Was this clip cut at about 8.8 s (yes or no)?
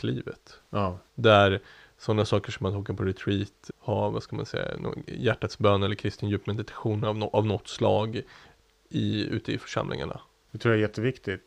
no